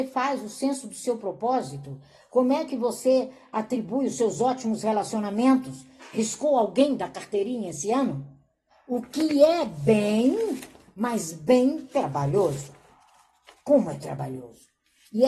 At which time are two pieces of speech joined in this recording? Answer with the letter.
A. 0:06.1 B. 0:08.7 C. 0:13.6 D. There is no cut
B